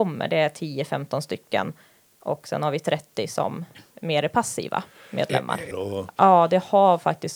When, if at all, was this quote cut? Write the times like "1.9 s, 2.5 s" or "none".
5.7 s

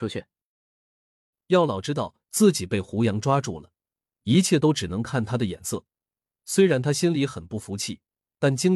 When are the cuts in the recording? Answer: none

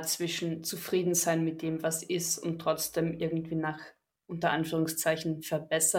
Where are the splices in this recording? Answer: none

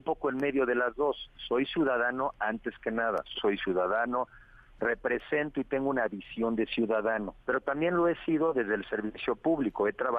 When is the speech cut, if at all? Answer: 3.3 s, 7.4 s

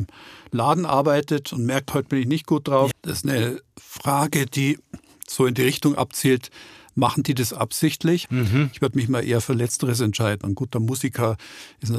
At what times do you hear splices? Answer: 2.9 s, 8.3 s, 10.4 s

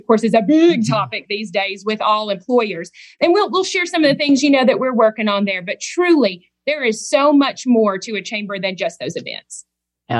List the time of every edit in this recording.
none

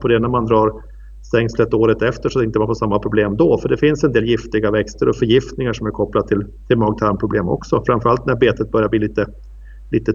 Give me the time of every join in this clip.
none

